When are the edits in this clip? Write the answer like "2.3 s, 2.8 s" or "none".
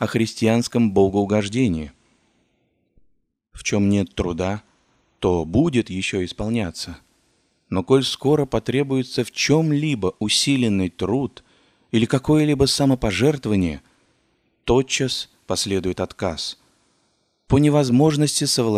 none